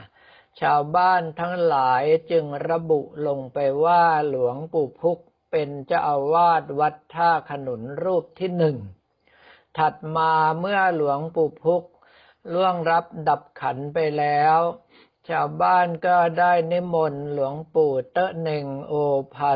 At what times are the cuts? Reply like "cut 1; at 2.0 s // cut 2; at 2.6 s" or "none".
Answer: none